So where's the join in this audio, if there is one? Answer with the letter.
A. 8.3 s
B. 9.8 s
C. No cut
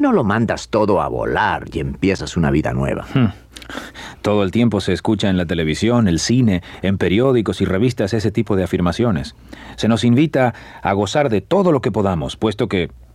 C